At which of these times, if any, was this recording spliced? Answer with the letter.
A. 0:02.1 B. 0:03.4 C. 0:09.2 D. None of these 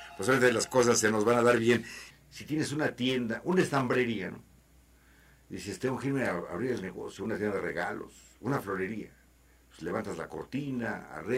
A